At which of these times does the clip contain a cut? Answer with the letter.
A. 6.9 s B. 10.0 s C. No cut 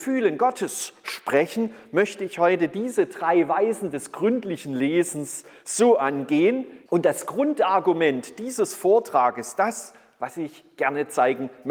A